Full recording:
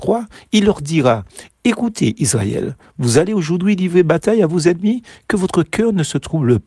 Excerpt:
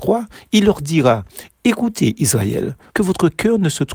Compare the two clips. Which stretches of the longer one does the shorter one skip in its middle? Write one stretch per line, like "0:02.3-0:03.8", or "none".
0:02.9-0:05.2